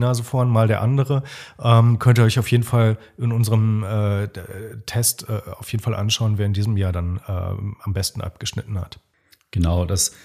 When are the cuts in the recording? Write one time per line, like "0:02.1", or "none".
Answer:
none